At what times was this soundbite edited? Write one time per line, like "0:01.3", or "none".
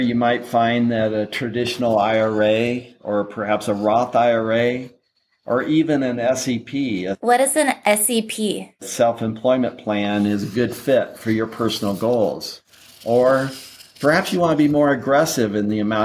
none